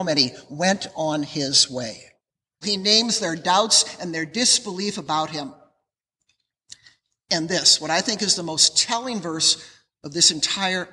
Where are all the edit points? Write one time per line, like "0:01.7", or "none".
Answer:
0:02.6